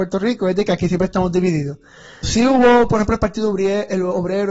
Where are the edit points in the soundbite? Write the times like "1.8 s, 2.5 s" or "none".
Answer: 2.2 s